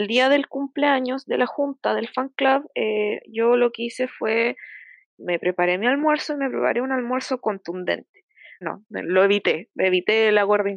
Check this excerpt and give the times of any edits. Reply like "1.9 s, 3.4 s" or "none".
5.1 s, 8.6 s